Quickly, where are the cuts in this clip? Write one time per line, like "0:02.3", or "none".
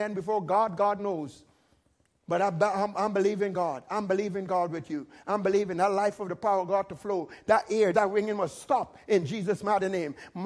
0:07.9